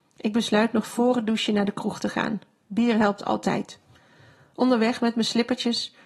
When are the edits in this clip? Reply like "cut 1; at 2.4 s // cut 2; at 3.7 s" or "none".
none